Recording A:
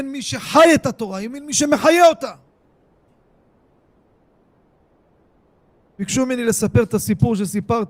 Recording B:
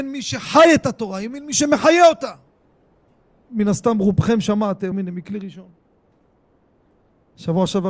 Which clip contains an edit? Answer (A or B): B